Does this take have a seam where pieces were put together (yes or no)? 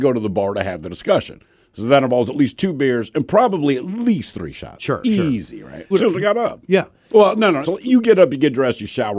yes